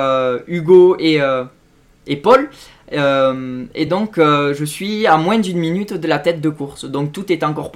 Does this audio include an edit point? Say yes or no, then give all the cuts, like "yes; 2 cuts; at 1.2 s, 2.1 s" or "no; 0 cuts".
no; 0 cuts